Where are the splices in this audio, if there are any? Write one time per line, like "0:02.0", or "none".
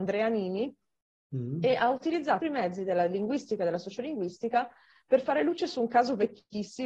0:02.4